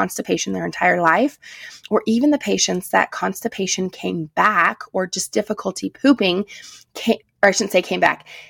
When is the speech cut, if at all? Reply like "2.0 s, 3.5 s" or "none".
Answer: 7.2 s